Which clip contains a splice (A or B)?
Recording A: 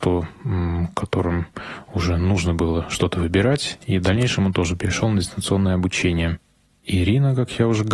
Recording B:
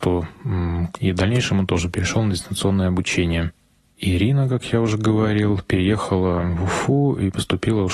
B